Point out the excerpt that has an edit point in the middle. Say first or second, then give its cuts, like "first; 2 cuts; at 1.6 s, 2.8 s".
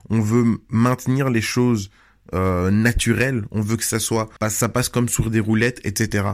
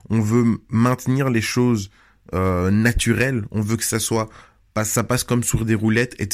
first; 1 cut; at 4.4 s